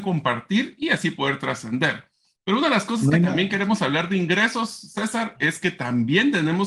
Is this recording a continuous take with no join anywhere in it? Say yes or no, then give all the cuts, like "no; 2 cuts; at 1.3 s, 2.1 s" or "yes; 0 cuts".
yes; 0 cuts